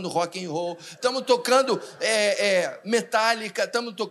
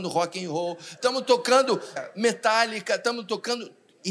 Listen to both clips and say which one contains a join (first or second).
second